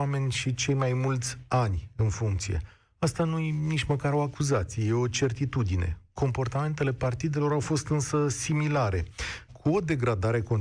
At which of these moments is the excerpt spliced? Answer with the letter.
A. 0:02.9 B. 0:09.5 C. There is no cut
B